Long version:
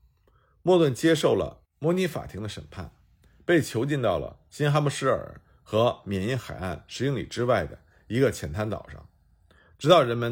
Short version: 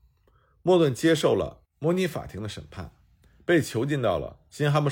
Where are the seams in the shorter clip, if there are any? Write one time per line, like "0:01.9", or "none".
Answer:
none